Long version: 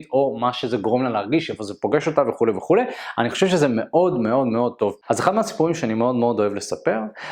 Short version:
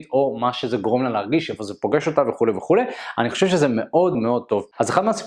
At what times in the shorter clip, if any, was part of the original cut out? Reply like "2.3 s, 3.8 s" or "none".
4.1 s